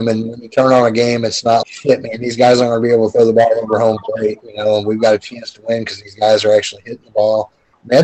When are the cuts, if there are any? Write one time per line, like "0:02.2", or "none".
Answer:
0:01.6